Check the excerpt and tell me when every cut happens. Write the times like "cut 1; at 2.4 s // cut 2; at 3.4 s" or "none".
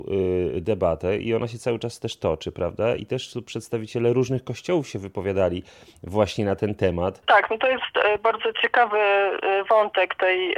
none